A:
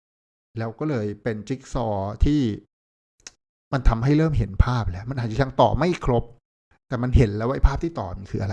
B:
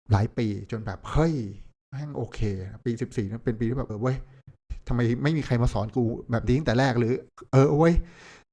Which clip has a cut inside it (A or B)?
B